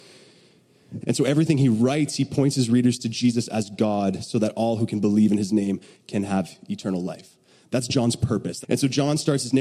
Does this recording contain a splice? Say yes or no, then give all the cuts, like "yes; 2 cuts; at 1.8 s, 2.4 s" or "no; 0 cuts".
yes; 2 cuts; at 1.0 s, 8.6 s